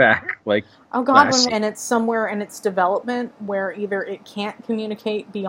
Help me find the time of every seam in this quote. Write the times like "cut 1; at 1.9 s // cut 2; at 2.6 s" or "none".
cut 1; at 1.5 s